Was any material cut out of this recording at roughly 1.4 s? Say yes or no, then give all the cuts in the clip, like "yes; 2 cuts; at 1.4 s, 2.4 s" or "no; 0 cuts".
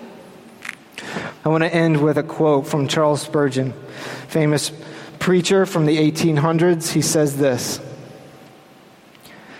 yes; 1 cut; at 1.4 s